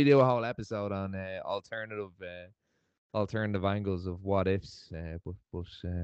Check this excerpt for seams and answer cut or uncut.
uncut